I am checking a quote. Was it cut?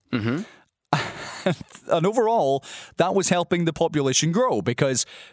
no; 0 cuts

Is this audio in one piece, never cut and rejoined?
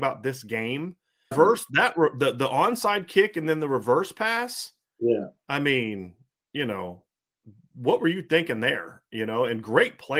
no; 1 cut; at 1.3 s

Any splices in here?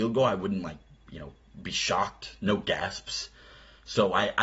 no; 0 cuts

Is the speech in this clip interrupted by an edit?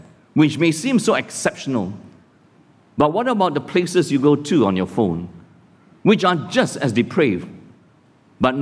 no; 0 cuts

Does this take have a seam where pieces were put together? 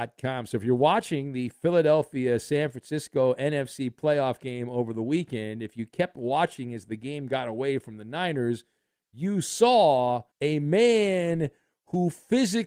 yes; 1 cut; at 10.3 s

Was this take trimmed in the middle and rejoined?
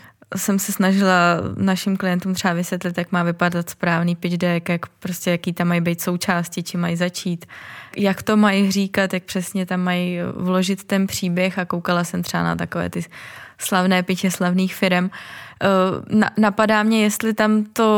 yes; 1 cut; at 7.9 s

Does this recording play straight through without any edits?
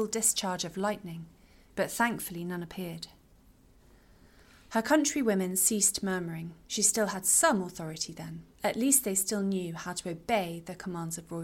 no; 2 cuts; at 6.6 s, 8.5 s

